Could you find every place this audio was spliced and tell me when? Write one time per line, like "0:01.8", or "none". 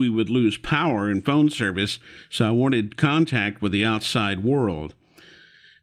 none